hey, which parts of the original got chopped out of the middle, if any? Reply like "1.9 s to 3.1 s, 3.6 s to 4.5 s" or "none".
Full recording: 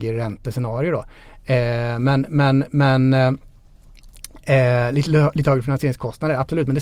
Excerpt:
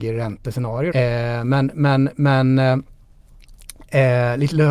0.9 s to 1.5 s